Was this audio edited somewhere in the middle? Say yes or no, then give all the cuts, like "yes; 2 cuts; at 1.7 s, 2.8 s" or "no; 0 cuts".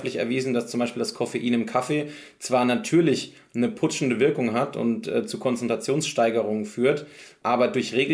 no; 0 cuts